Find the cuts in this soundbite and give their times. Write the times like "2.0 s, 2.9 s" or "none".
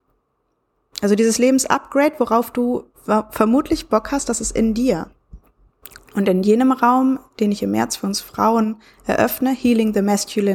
6.0 s